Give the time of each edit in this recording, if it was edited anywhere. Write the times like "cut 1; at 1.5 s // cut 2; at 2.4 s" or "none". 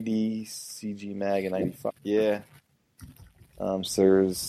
cut 1; at 1.9 s